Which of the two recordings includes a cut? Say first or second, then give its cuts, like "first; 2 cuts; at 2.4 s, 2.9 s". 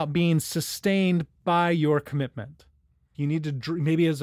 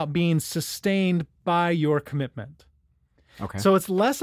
first; 1 cut; at 3.1 s